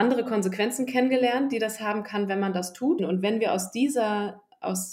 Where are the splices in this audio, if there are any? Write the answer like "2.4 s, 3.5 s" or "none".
3.0 s